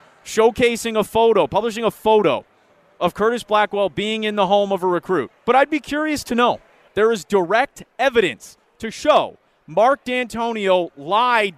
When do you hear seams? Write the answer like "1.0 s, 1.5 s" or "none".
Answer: 5.3 s, 6.9 s

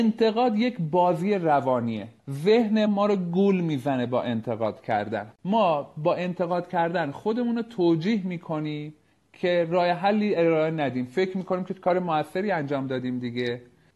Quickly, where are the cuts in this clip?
2.9 s

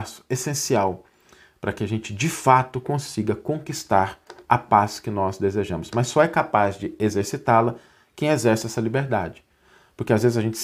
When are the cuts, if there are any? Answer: none

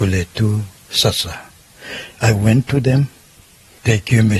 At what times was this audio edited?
none

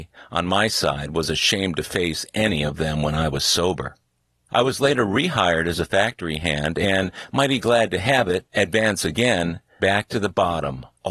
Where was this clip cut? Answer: 4.5 s, 9.8 s

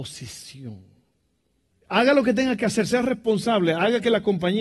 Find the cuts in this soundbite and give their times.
1.7 s

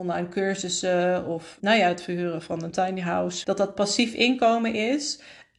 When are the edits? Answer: 1.6 s, 3.4 s

